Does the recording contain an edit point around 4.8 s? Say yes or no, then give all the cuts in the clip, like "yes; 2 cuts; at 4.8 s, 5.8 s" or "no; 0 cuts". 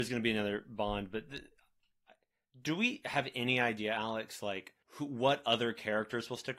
yes; 1 cut; at 4.8 s